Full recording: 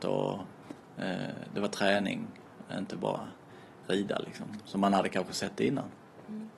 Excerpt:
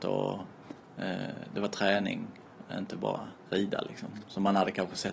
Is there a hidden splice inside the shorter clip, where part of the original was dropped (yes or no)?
yes